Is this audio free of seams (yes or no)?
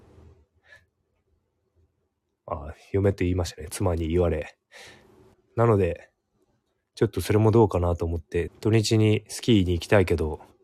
no